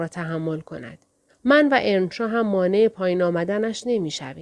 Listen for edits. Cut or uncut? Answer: cut